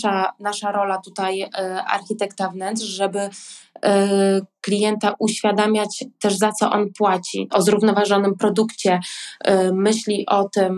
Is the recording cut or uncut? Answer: cut